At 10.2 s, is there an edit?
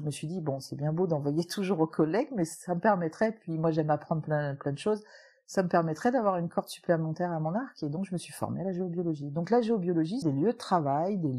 yes; 1 cut; at 10.2 s

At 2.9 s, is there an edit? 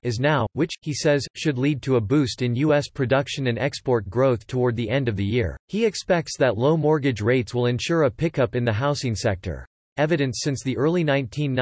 no; 2 cuts; at 5.6 s, 9.9 s

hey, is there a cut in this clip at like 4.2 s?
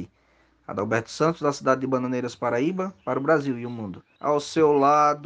yes; 1 cut; at 4.2 s

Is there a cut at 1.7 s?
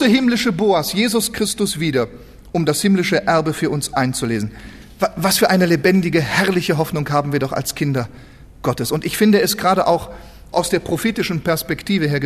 no; 1 cut; at 10.5 s

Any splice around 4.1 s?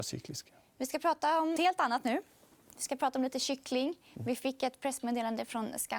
no; 1 cut; at 1.6 s

